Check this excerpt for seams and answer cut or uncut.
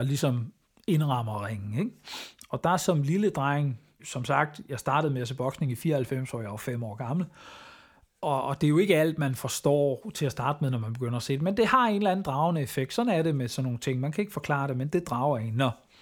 cut